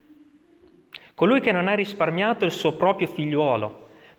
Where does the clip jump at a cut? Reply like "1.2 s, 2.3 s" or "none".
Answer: none

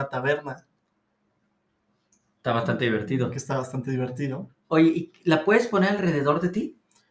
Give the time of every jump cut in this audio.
none

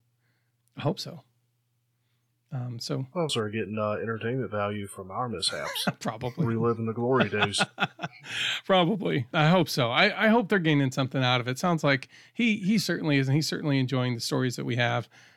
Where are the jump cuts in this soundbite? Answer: 3.3 s, 9.3 s

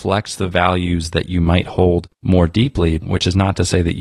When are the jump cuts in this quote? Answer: 3.0 s

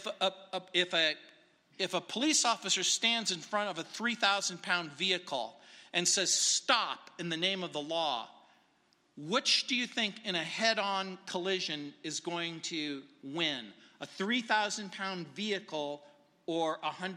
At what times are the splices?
none

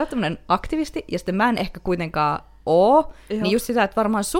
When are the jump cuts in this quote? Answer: none

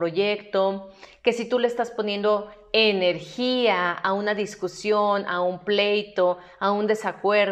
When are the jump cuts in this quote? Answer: none

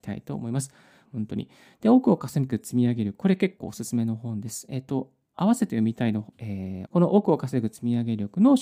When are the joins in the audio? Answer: 1.1 s, 6.9 s

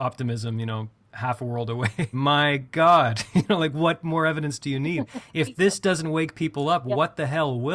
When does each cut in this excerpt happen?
2.1 s

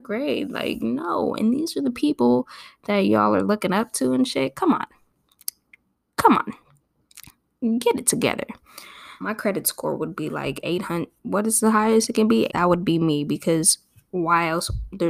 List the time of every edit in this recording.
9.2 s, 12.5 s

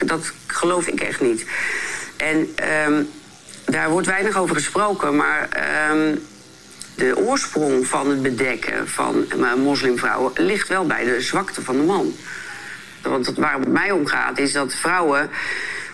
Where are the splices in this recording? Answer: 7.0 s, 13.0 s

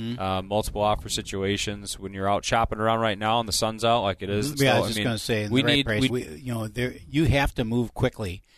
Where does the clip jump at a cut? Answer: 4.5 s, 6.1 s

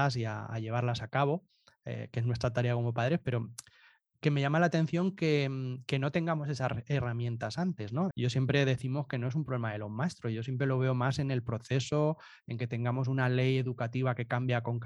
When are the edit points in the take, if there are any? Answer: 8.1 s

